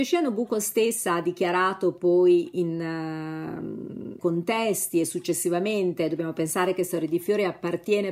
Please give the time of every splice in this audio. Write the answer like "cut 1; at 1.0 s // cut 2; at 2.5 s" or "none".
cut 1; at 4.2 s